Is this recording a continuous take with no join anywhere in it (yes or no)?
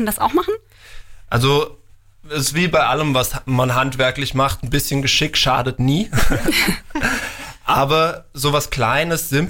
yes